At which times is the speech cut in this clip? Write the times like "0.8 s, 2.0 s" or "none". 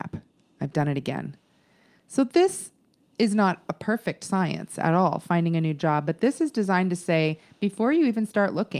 none